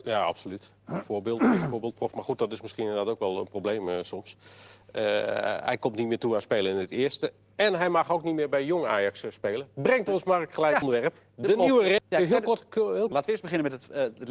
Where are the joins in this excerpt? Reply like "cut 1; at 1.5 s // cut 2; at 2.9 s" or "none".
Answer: cut 1; at 10.8 s // cut 2; at 12.0 s // cut 3; at 13.1 s